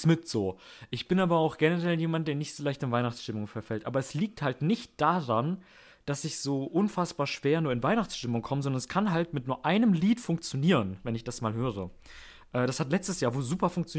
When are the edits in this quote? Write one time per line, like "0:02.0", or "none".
none